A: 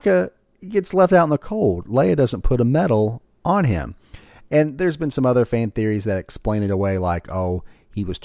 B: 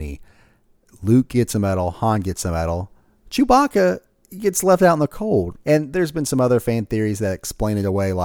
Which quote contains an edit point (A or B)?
B